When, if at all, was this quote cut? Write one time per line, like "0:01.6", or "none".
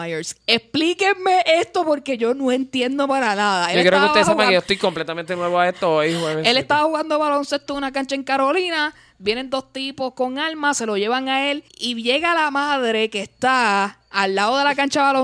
0:11.7